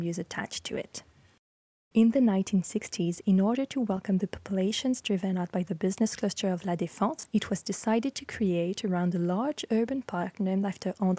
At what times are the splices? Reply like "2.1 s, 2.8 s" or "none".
1.9 s, 7.3 s